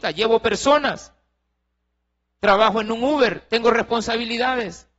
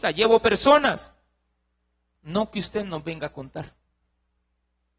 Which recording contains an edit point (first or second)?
second